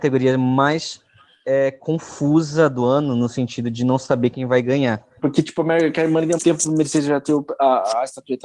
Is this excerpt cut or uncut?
cut